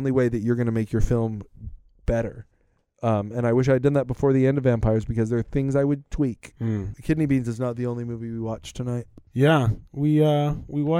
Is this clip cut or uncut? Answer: cut